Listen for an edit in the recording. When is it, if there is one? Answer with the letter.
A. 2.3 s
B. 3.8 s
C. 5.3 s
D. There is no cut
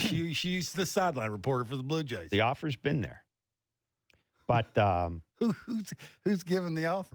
C